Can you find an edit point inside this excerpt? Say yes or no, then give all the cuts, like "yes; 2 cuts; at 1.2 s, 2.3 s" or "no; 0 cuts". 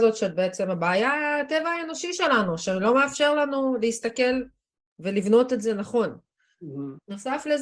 no; 0 cuts